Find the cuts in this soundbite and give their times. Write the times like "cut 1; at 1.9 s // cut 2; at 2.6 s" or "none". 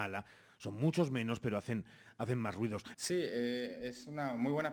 cut 1; at 2.9 s

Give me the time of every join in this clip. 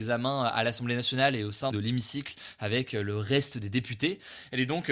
cut 1; at 1.7 s

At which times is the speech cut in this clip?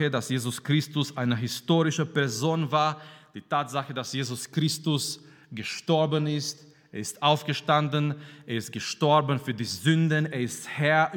none

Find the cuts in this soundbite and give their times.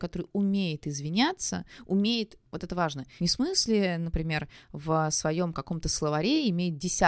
cut 1; at 3.2 s

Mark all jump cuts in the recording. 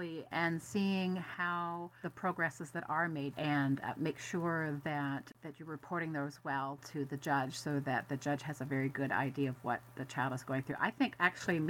cut 1; at 3.3 s

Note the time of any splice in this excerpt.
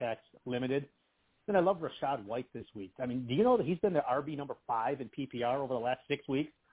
none

